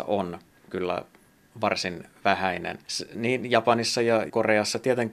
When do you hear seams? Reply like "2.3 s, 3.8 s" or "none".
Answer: 2.9 s